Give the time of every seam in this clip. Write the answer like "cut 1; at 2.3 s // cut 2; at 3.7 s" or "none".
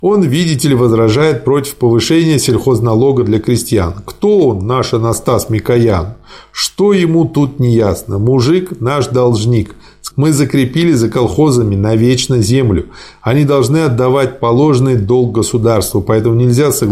cut 1; at 10.1 s